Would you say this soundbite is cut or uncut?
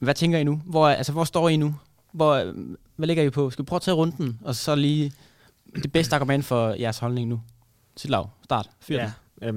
uncut